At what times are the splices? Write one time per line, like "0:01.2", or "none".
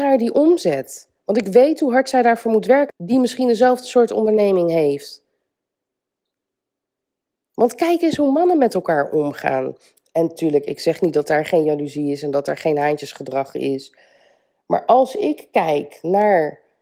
0:02.9